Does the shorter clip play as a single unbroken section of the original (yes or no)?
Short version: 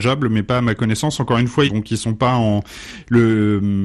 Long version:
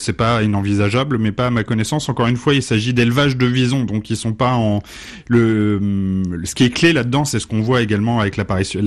no